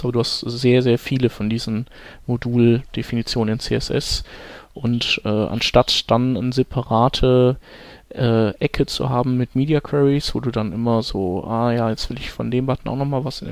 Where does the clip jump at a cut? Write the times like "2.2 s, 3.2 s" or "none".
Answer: none